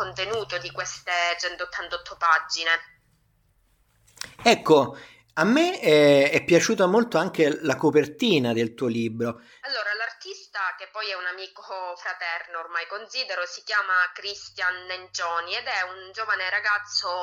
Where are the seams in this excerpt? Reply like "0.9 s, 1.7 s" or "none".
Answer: 9.6 s